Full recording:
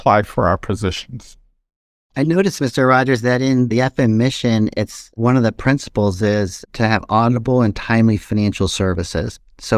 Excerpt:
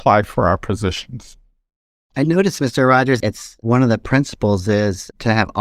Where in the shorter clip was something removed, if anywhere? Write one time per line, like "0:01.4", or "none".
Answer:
0:03.2